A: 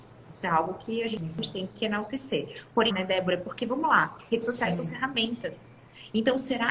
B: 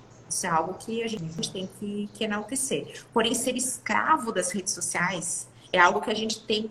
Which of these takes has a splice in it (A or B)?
A